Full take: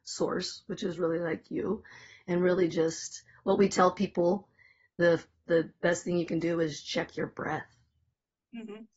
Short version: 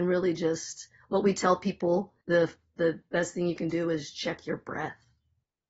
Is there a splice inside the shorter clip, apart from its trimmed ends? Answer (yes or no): yes